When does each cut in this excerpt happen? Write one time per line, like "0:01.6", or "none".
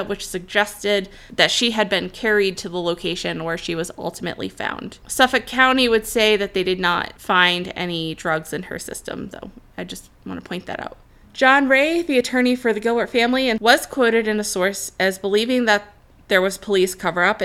none

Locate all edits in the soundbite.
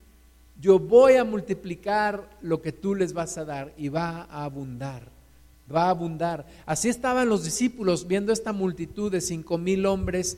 none

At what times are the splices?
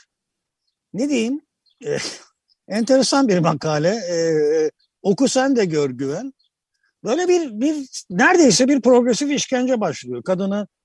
none

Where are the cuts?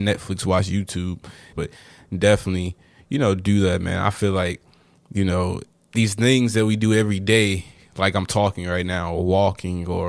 0:01.5

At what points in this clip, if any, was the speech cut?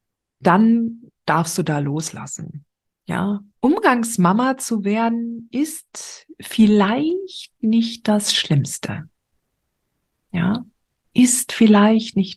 0:03.5

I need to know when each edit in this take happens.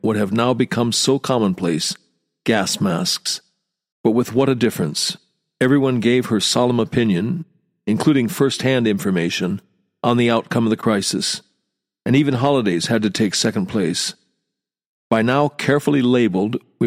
0:03.9

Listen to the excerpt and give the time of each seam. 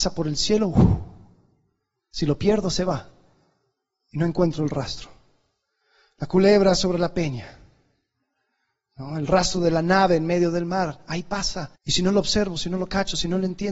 0:11.7

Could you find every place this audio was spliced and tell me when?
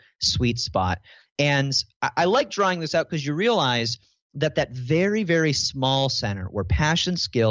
none

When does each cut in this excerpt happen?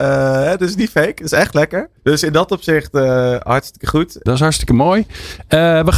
0:02.0
0:04.3

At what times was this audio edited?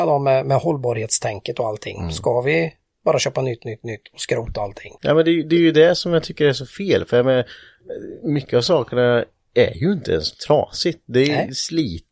0:05.0

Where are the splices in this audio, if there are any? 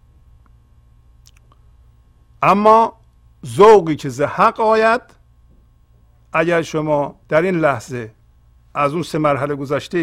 0:07.2

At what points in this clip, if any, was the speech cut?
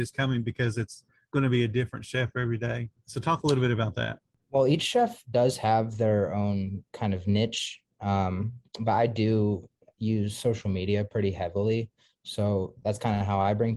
none

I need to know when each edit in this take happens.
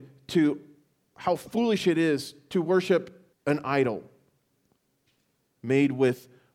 0:03.3

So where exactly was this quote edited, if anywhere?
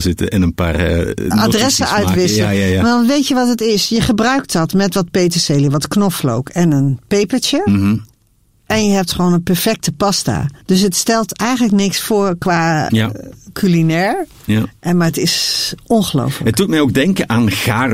0:10.6

